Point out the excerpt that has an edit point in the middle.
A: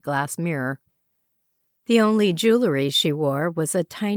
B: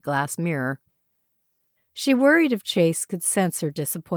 B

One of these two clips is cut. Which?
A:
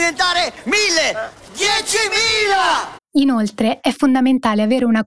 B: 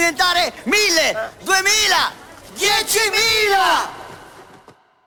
A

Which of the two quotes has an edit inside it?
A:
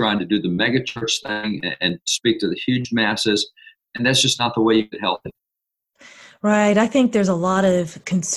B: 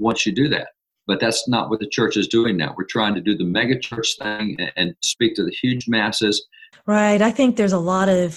B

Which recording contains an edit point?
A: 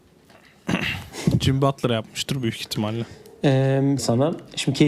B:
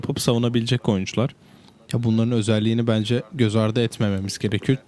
A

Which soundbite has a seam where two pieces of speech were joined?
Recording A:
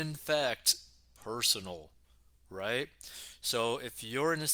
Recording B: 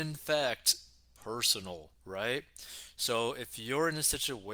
B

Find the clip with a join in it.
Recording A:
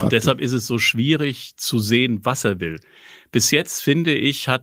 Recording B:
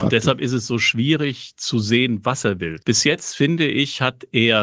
B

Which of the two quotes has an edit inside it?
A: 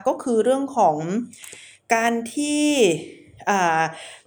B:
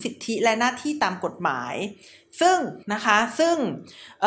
B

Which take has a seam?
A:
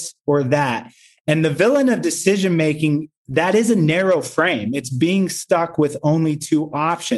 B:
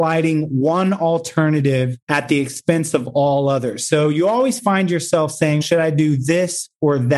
B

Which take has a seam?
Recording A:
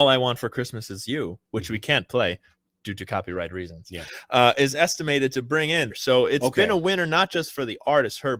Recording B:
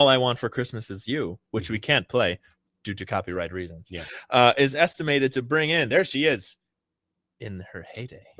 A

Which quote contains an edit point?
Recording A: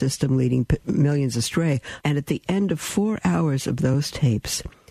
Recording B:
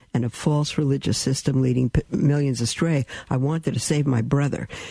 A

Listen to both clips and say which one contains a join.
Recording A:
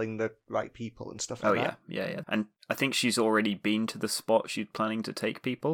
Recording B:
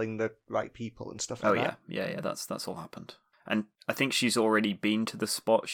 A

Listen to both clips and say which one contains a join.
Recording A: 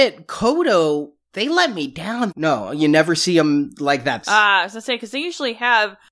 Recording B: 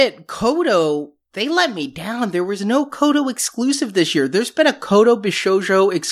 A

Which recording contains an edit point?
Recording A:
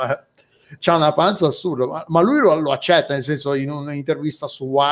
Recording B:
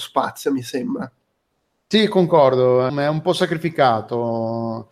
B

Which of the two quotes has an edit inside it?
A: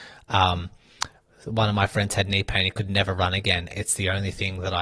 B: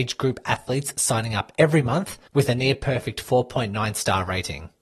A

